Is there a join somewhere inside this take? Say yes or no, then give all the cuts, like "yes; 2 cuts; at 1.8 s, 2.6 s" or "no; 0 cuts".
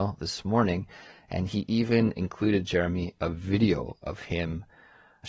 no; 0 cuts